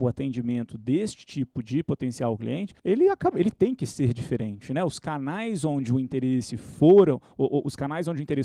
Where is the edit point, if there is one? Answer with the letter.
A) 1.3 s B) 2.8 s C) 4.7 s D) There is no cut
B